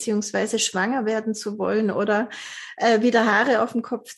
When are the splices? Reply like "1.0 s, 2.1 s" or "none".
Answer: none